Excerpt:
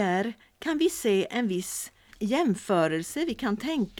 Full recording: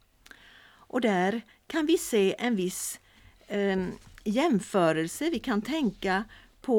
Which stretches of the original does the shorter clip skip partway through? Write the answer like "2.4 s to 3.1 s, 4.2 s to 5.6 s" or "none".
3.2 s to 4.2 s